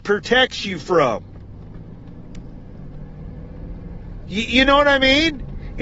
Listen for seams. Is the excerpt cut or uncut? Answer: uncut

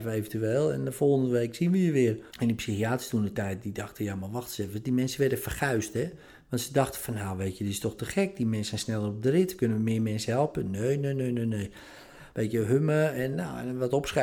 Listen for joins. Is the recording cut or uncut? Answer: cut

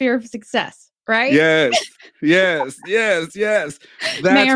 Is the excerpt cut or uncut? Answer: cut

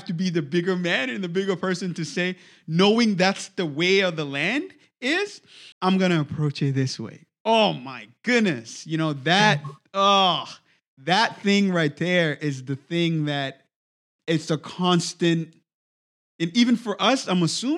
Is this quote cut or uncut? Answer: cut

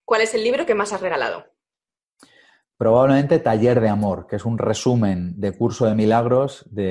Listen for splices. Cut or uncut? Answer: uncut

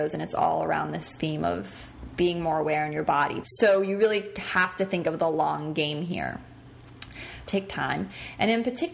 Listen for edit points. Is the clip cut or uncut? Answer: cut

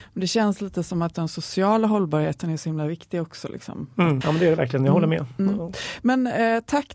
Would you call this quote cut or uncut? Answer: cut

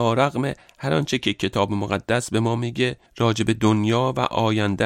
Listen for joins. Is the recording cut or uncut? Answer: cut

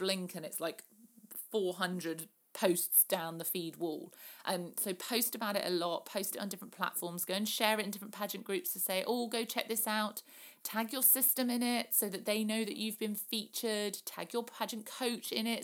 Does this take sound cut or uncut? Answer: uncut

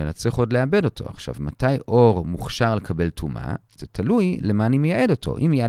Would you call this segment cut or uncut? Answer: uncut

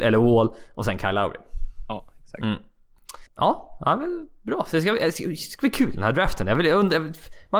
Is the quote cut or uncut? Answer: cut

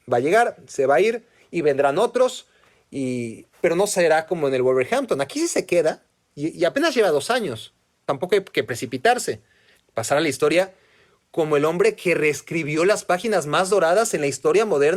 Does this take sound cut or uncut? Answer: cut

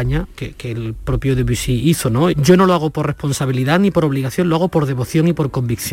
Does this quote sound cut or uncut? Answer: cut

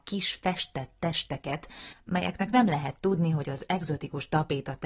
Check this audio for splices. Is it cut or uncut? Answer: uncut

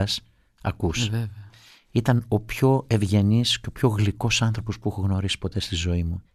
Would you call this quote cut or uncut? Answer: uncut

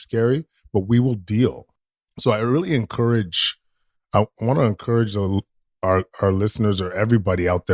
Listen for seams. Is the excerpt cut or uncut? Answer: uncut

